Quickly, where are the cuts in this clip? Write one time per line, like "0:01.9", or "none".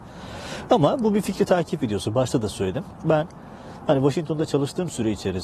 none